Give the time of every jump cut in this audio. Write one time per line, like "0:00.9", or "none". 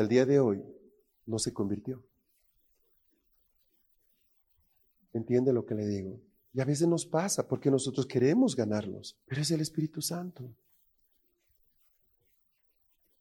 0:09.2